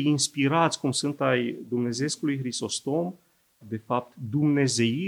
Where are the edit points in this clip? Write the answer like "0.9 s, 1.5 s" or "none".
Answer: 3.6 s